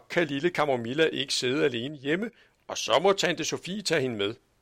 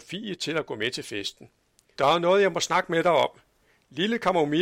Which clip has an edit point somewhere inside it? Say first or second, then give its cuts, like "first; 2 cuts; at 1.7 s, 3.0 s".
second; 1 cut; at 1.9 s